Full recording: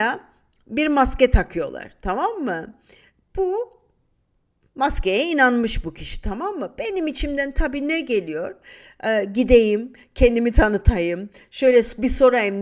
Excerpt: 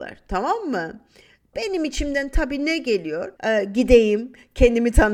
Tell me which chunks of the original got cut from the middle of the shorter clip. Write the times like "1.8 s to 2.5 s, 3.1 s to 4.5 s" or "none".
3.3 s to 6.8 s, 8.6 s to 9.0 s